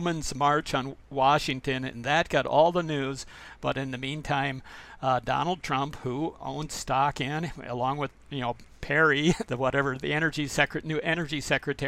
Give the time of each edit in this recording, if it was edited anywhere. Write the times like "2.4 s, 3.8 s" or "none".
8.2 s, 9.4 s